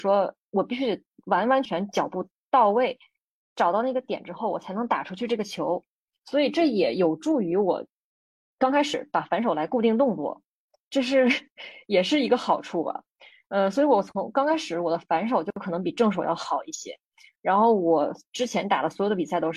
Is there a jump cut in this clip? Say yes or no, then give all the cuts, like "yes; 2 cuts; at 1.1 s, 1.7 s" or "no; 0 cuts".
yes; 1 cut; at 1.7 s